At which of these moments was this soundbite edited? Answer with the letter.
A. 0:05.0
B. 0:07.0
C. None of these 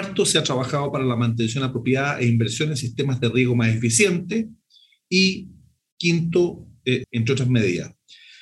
B